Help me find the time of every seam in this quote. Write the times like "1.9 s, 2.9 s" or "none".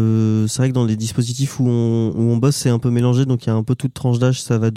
none